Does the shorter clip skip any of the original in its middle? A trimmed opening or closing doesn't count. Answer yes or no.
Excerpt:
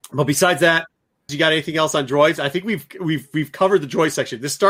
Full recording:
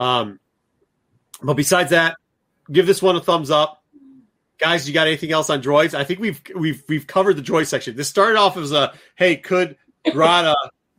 yes